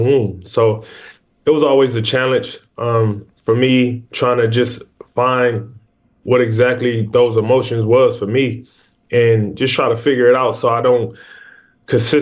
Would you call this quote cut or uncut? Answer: uncut